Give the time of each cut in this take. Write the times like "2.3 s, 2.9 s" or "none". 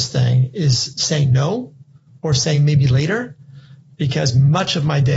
none